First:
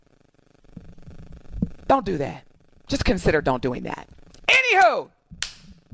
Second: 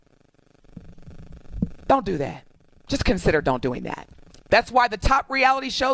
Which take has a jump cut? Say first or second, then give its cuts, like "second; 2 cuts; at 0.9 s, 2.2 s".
second; 1 cut; at 4.4 s